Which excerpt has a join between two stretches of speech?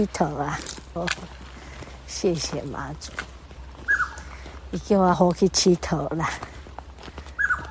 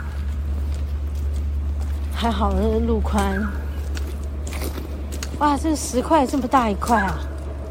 first; 2 cuts; at 1.0 s, 5.1 s

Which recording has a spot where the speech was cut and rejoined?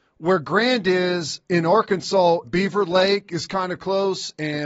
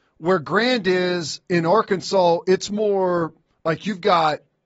first; 1 cut; at 2.4 s

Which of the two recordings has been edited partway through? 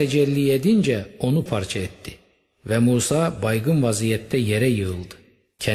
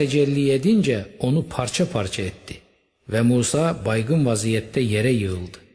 first; 1 cut; at 1.5 s

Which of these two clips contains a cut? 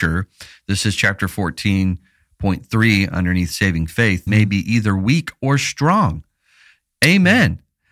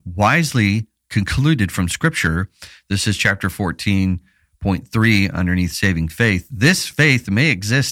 first; 1 cut; at 4.3 s

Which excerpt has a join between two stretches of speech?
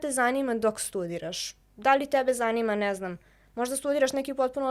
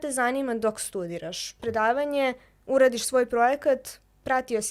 second; 1 cut; at 1.6 s

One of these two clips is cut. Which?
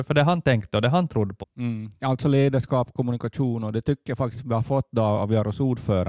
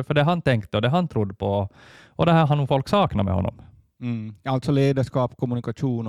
first; 1 cut; at 1.4 s

